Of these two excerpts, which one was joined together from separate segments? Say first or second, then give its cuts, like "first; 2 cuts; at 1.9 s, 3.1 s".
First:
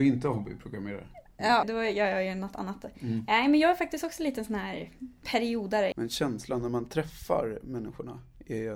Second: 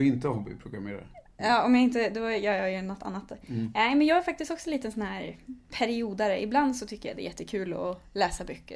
first; 2 cuts; at 1.6 s, 5.9 s